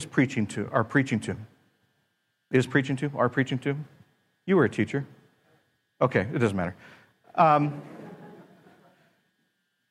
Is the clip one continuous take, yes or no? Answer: yes